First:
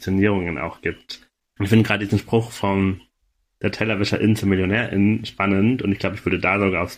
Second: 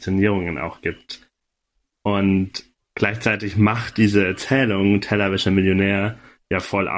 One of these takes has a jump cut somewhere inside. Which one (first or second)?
first